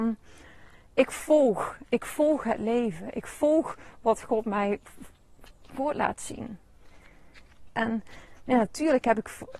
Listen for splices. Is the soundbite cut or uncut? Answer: cut